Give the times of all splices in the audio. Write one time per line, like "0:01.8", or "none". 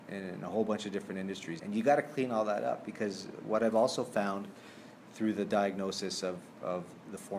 0:01.6

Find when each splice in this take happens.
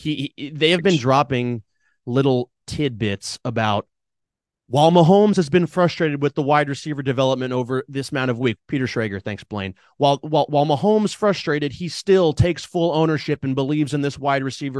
0:08.6

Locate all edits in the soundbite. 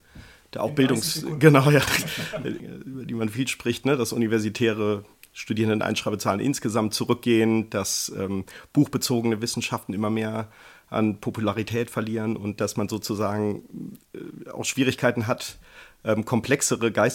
0:02.6

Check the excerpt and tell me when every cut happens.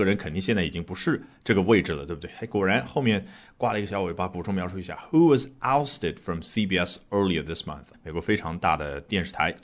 0:07.9

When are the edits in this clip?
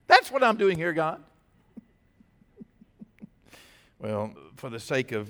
0:04.4

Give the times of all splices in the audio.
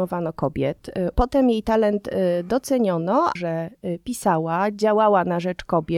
0:01.1
0:03.4

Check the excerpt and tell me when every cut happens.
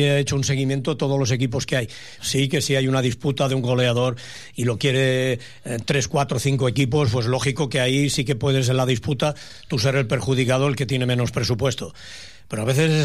0:02.2

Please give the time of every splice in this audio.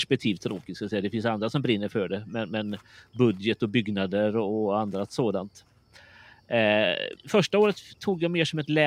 0:07.2

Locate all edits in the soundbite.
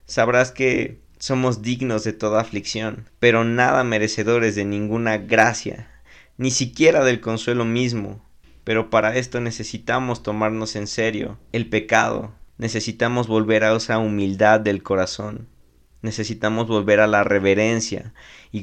0:12.5

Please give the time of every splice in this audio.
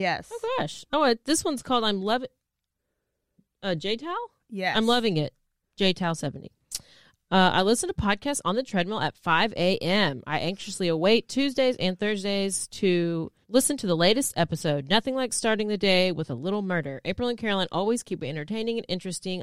0:13.4

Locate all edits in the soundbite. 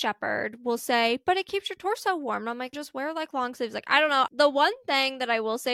0:02.7
0:04.3

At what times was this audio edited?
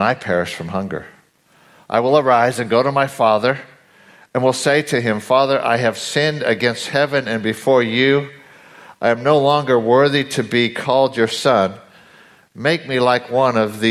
none

